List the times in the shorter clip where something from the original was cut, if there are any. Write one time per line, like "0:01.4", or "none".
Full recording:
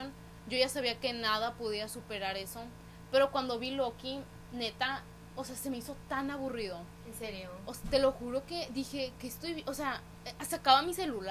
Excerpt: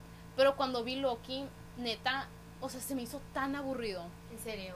none